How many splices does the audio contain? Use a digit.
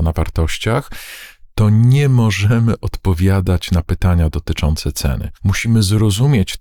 1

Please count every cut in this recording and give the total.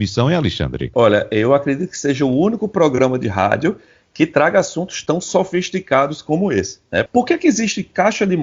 2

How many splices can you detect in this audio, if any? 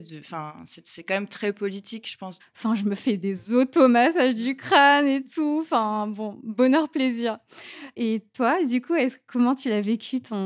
1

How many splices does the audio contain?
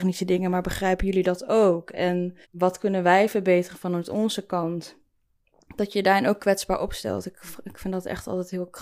1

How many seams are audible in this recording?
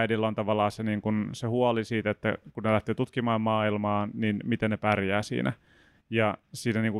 0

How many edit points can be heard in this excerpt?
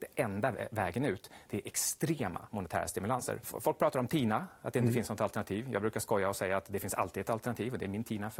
1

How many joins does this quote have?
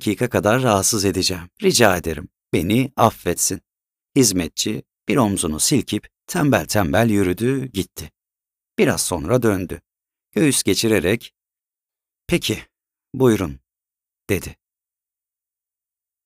1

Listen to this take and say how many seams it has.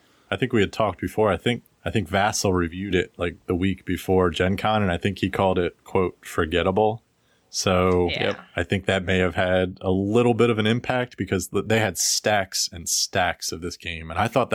0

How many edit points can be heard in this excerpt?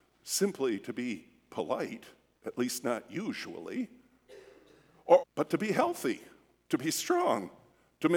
1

